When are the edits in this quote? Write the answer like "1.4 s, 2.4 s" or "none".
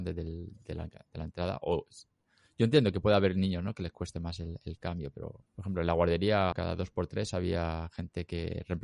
5.5 s, 6.5 s